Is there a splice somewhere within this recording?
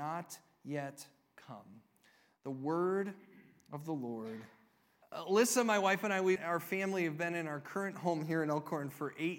yes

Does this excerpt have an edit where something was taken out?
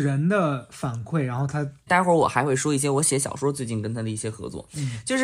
yes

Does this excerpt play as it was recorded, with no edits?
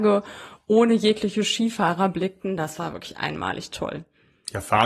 yes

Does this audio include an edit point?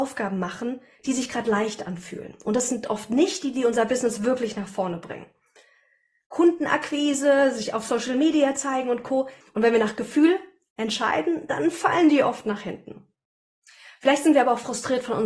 yes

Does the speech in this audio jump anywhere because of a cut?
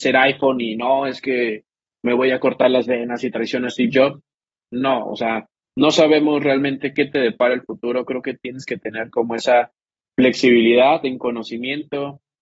no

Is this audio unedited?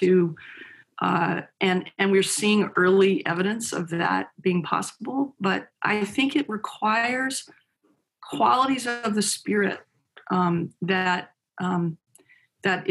yes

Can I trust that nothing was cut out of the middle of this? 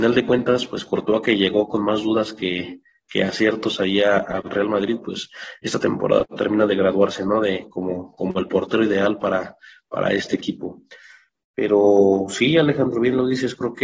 yes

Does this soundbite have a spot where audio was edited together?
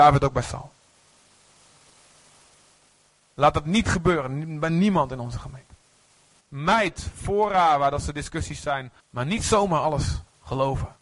yes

